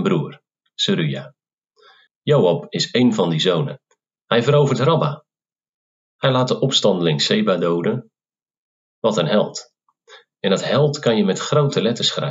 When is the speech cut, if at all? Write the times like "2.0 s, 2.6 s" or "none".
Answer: 2.1 s, 4.2 s